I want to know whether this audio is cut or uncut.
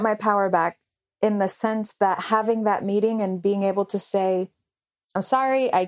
uncut